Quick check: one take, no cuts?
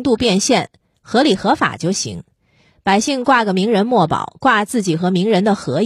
yes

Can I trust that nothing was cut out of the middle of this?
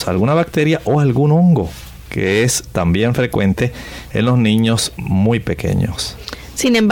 yes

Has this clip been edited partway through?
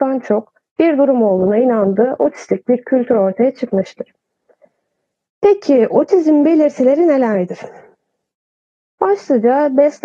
no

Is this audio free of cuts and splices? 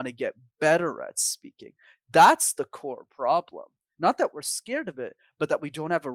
yes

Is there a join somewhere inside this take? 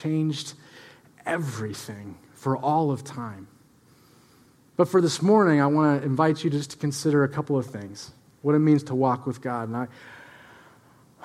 no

